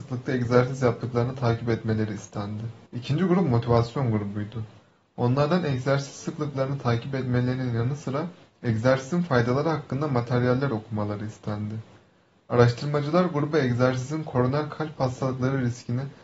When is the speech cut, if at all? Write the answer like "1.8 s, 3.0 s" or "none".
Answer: 2.9 s